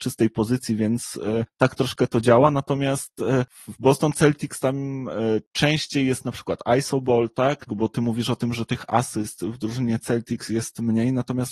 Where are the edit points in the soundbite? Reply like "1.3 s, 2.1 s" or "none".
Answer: 7.7 s